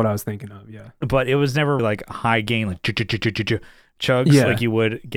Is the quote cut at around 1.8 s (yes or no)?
yes